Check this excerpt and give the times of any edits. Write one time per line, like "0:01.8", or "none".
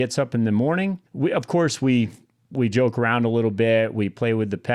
0:01.1

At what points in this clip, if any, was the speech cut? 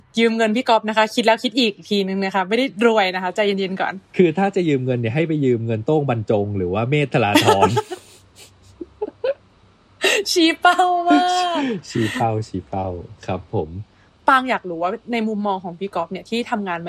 none

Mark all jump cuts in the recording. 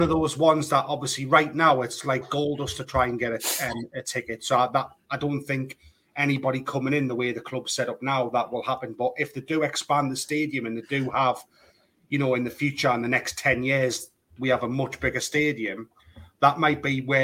none

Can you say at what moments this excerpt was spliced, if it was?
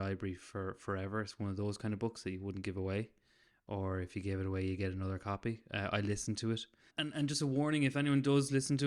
0:06.9

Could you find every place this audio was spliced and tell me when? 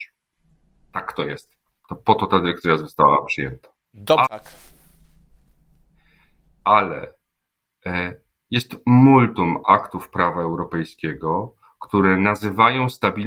0:04.2

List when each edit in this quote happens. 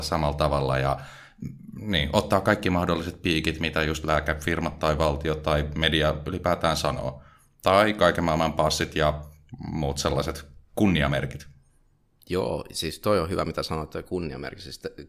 none

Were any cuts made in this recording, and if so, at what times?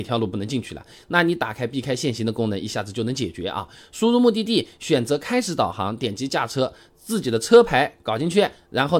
none

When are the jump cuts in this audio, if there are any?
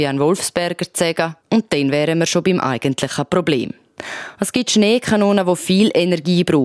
0:01.4

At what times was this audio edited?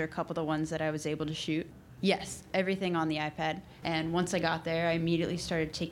0:02.0
0:03.8

